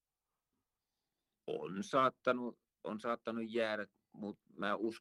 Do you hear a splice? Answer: yes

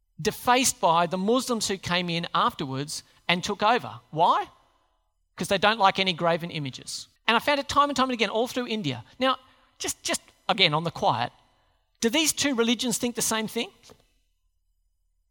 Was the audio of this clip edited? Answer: yes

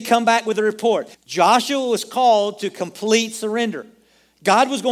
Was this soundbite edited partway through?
yes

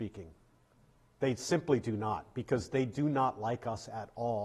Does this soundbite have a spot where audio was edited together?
no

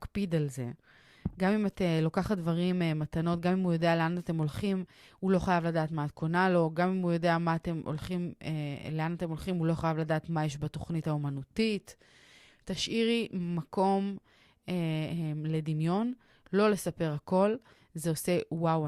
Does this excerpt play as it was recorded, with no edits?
yes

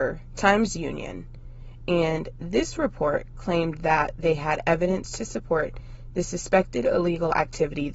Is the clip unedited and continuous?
no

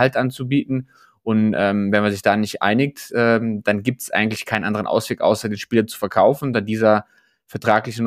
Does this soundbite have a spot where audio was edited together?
no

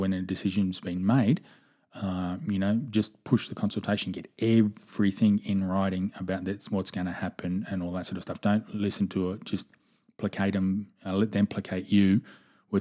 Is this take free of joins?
yes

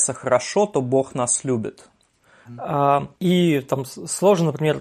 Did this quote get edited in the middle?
yes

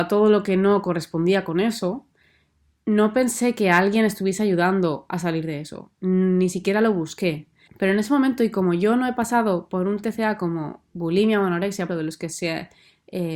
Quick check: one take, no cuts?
no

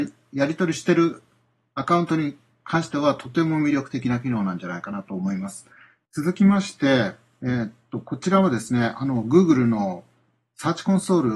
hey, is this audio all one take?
no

